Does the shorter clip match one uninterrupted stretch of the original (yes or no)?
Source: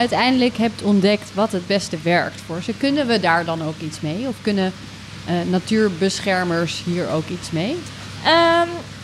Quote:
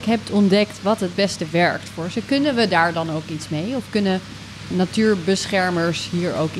no